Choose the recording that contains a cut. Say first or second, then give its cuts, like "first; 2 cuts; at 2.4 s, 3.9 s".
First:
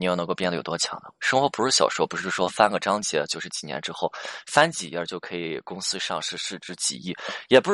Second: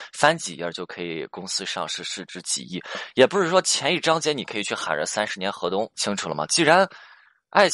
second; 1 cut; at 5.9 s